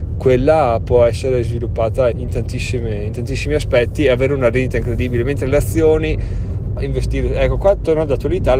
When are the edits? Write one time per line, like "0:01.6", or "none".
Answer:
0:02.1
0:06.8